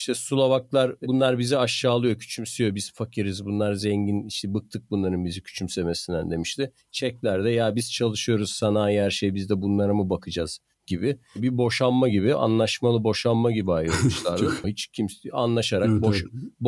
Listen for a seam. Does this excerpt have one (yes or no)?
yes